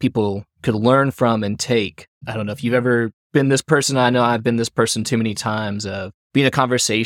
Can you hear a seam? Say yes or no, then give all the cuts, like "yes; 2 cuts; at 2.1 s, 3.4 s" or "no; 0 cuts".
no; 0 cuts